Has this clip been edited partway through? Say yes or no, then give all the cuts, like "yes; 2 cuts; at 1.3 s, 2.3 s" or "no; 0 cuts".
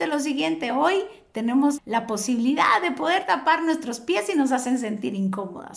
yes; 1 cut; at 1.8 s